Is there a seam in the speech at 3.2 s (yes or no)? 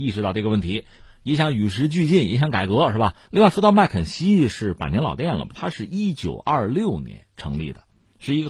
yes